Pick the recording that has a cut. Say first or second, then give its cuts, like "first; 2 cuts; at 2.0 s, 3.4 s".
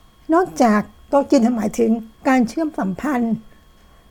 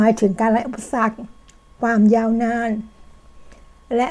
first; 1 cut; at 2.2 s